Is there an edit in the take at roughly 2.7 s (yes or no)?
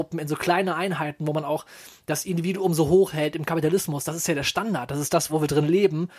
no